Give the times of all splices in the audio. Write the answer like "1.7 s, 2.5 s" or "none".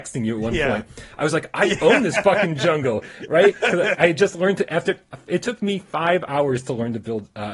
4.0 s